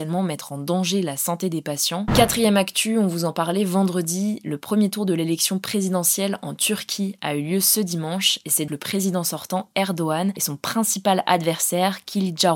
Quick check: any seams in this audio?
yes; 2 cuts; at 2.1 s, 8.7 s

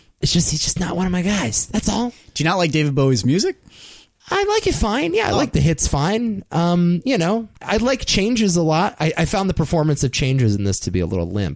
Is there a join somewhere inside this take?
yes; 1 cut; at 7.6 s

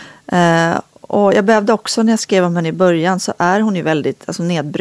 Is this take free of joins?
yes; 0 cuts

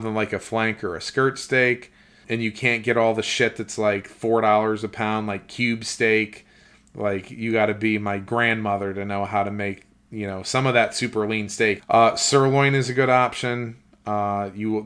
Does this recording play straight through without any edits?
no; 2 cuts; at 2.2 s, 11.8 s

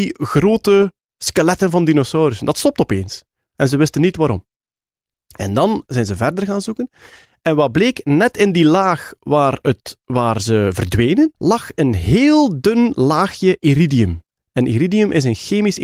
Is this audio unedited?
no; 1 cut; at 11.3 s

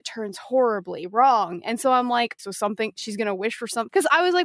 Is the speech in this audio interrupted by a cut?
yes; 1 cut; at 2.4 s

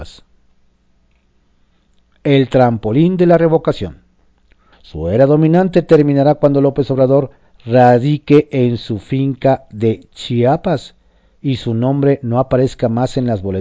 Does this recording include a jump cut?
yes; 1 cut; at 4.7 s

